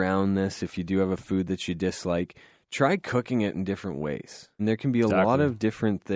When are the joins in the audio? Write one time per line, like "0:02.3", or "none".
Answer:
0:04.6